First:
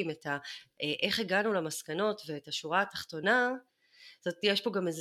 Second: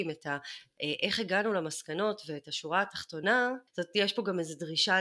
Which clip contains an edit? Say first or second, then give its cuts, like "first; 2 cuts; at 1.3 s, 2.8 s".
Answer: second; 1 cut; at 3.7 s